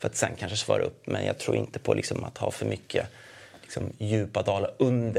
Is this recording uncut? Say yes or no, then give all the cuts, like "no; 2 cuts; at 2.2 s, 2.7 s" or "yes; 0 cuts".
yes; 0 cuts